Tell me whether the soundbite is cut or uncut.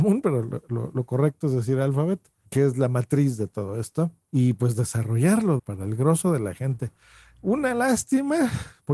cut